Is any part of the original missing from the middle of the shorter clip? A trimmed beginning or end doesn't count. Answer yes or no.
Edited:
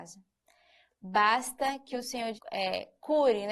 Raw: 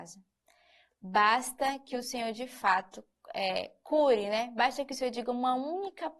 yes